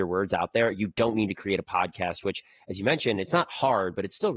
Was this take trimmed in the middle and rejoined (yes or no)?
no